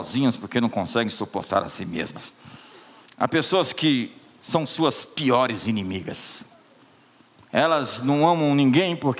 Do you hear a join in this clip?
yes; 1 cut; at 3.0 s

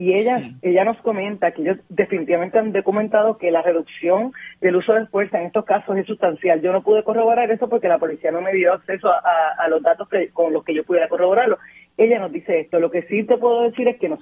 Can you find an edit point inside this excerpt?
no; 0 cuts

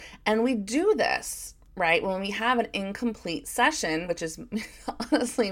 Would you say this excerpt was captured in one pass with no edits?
yes; 0 cuts

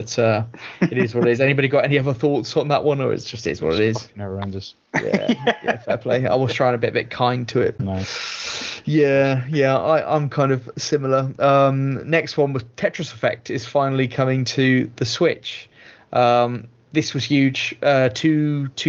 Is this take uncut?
no; 1 cut; at 7.8 s

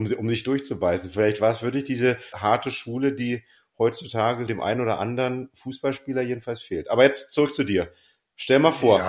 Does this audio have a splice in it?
yes; 2 cuts; at 2.3 s, 4.5 s

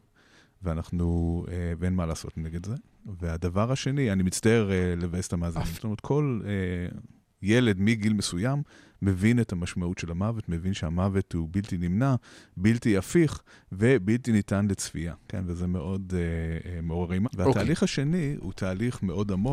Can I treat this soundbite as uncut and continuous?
no; 2 cuts; at 5.7 s, 17.2 s

